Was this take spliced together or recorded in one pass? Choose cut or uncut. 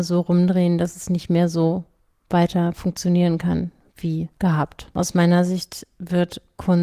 cut